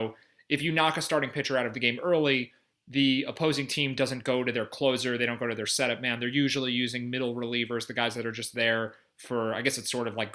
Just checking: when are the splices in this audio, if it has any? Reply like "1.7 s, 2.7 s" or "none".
none

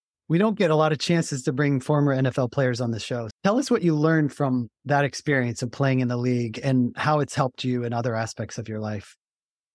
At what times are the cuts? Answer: 3.3 s

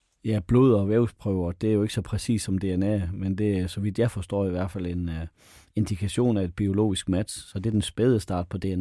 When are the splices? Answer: none

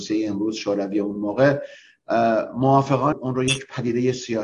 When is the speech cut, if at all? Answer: 3.1 s

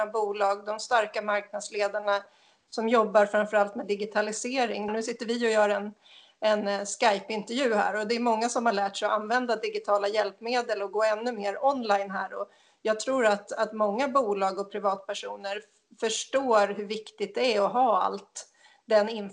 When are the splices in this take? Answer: 4.9 s

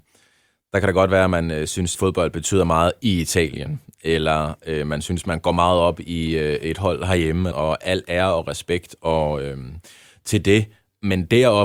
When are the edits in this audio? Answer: 1.9 s, 7.5 s

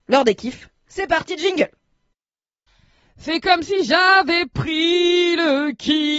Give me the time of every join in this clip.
none

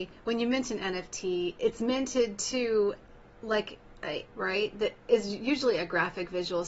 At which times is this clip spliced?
4.3 s

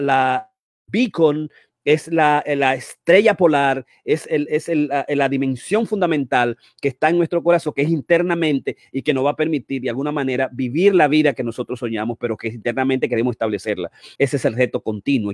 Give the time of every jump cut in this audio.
14.2 s

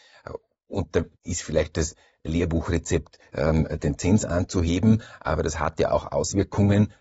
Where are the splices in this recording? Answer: 1.1 s

